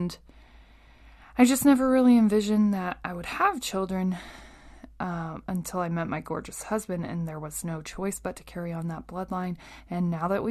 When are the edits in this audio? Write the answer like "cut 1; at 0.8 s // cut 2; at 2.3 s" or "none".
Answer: none